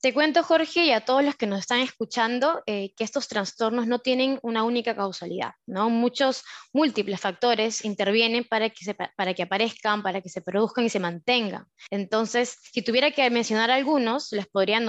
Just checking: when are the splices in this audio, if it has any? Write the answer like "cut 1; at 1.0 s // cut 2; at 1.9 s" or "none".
none